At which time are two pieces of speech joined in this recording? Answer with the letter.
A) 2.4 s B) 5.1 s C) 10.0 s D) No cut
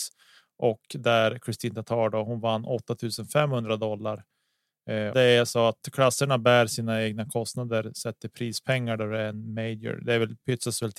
B